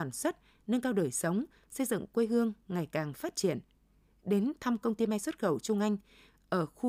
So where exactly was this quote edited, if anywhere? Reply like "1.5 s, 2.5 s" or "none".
none